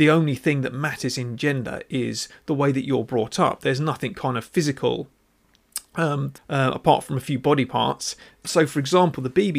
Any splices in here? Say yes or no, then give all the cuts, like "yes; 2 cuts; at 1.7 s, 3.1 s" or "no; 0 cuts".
yes; 2 cuts; at 6.4 s, 8.4 s